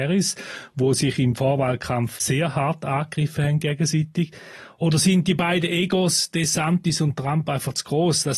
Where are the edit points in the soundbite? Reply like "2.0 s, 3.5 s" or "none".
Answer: none